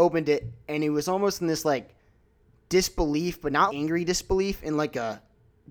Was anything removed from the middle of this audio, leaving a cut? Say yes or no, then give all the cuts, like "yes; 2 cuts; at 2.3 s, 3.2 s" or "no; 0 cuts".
yes; 1 cut; at 3.7 s